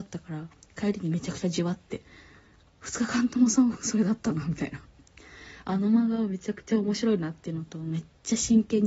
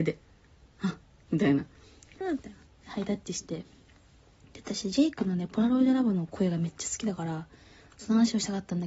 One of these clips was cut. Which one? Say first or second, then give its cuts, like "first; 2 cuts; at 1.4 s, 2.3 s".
second; 1 cut; at 2.2 s